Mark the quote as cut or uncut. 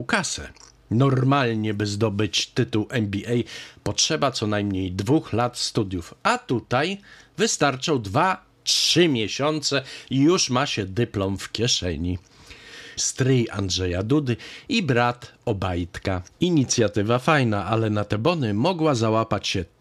cut